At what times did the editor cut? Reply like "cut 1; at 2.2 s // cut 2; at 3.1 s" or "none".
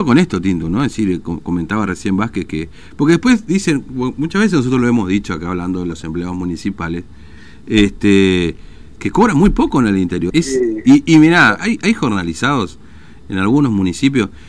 cut 1; at 10.3 s // cut 2; at 11.6 s